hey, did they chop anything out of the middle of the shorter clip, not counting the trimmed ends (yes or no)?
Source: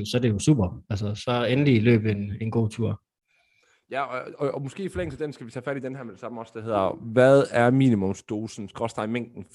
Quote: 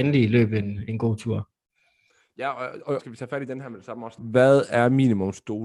yes